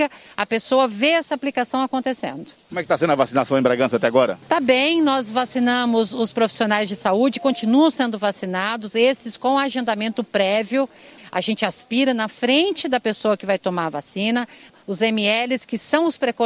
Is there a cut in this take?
yes; 2 cuts; at 11.2 s, 14.7 s

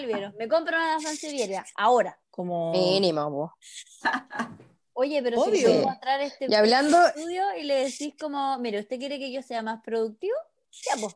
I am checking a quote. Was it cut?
yes; 1 cut; at 2.2 s

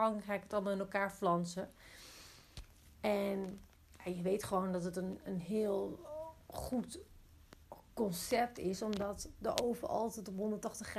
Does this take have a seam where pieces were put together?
no; 0 cuts

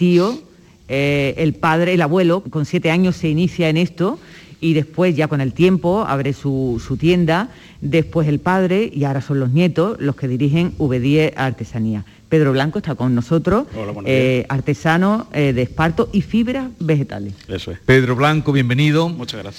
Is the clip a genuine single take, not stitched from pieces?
no; 1 cut; at 2.4 s

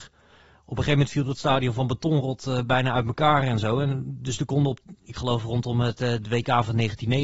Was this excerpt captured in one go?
yes; 0 cuts

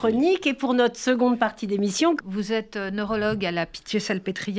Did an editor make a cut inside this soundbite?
yes; 1 cut; at 2.2 s

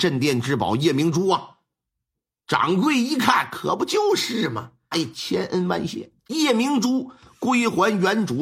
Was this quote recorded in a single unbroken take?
no; 2 cuts; at 4.9 s, 6.2 s

